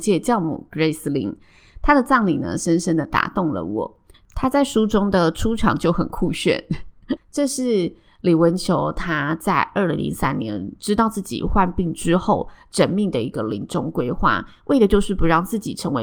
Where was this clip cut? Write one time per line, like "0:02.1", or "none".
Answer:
0:04.1
0:07.2

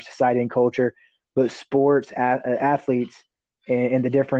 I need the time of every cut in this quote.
none

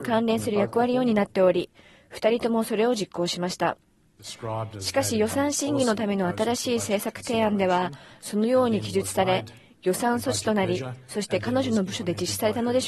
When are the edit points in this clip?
0:04.2

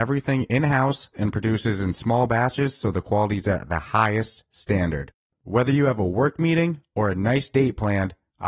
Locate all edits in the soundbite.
0:01.1

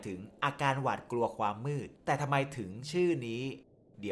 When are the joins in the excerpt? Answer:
0:02.0

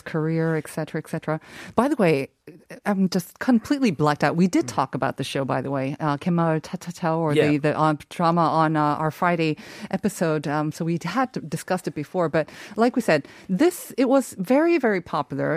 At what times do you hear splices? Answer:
none

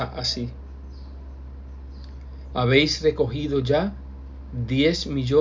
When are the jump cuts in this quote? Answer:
0:02.5

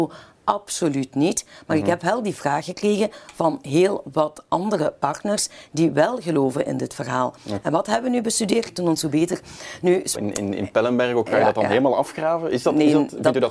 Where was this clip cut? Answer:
0:07.6
0:08.7
0:10.1

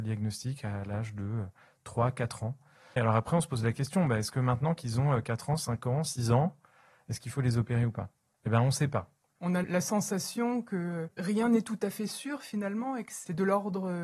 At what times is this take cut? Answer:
0:09.4

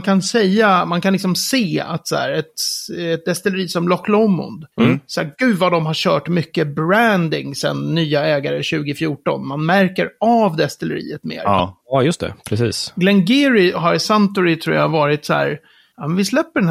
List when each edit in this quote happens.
none

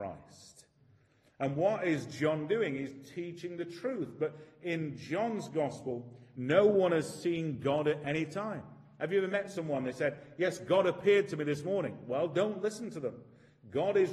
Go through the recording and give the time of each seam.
0:06.3

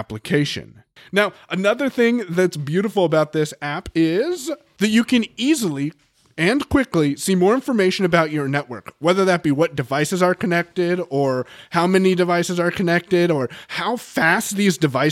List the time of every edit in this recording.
0:01.0

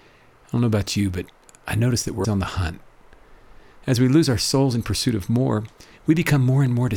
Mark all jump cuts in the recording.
0:02.2

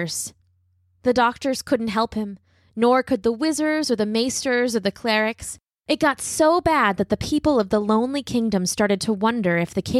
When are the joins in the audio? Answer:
none

